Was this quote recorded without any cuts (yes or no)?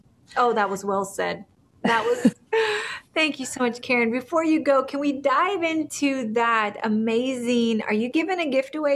no